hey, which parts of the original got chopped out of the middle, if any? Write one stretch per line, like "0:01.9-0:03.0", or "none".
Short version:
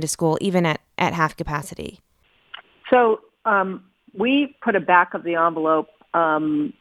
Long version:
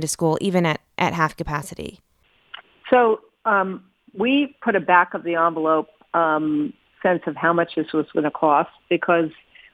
none

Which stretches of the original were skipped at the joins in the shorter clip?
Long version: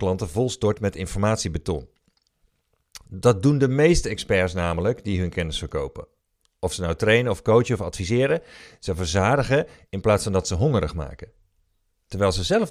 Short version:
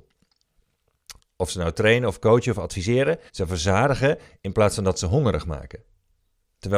0:03.0-0:06.4
0:08.5-0:08.7

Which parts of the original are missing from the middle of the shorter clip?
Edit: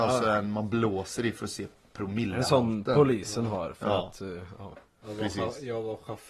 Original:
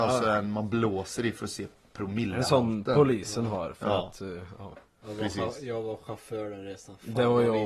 none

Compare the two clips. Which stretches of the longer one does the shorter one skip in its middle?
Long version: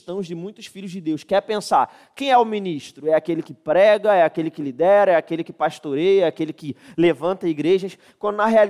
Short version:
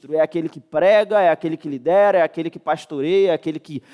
none

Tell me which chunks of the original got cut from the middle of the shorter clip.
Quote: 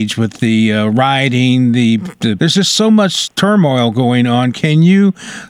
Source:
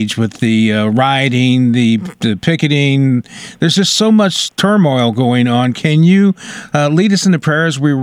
0:02.4-0:03.6

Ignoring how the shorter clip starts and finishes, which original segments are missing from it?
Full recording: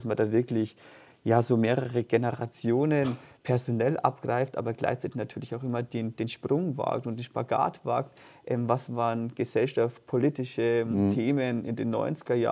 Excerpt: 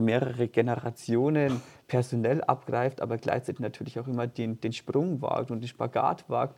none

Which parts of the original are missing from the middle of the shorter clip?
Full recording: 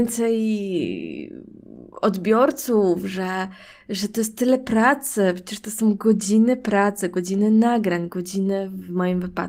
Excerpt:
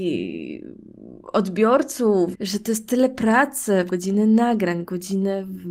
0:03.0-0:03.8
0:05.4-0:07.1

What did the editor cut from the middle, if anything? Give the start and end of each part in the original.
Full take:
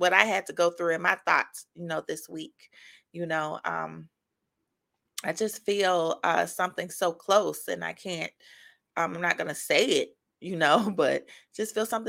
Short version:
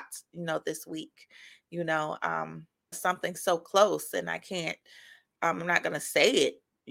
0:04.3-0:06.5

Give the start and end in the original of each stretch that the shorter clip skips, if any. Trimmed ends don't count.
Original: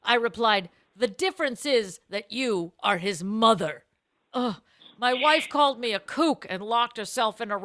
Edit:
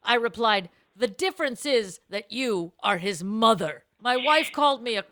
0:04.0-0:05.0

